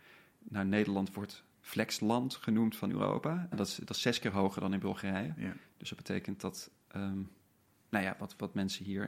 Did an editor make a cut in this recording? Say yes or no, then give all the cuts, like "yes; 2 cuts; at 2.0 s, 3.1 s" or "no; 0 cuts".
yes; 1 cut; at 3.5 s